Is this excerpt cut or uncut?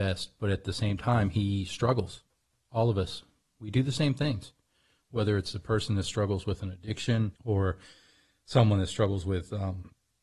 cut